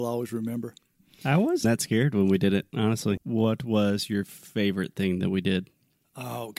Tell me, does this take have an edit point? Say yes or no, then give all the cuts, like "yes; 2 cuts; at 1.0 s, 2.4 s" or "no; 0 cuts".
yes; 2 cuts; at 1.6 s, 3.2 s